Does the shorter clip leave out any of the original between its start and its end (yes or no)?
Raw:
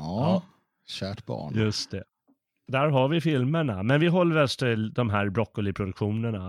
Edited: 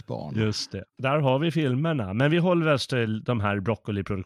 yes